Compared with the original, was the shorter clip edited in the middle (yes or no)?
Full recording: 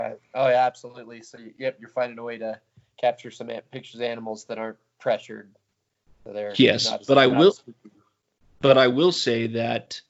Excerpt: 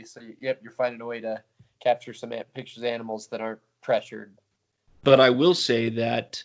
yes